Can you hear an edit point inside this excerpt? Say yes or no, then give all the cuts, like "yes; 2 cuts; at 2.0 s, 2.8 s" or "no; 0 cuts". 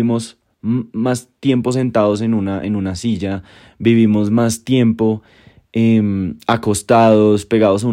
no; 0 cuts